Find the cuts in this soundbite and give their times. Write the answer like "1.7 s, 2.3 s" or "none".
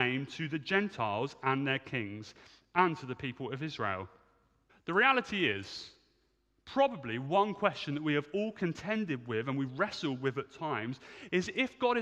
4.7 s